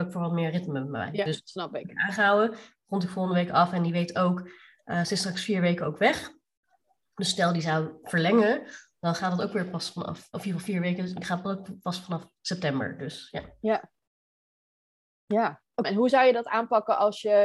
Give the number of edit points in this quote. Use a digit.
2